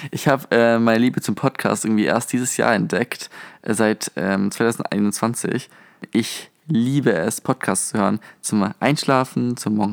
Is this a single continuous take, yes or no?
yes